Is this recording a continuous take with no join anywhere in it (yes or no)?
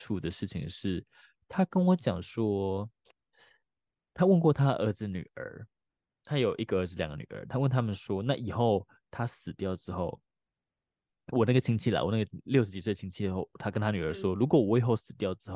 yes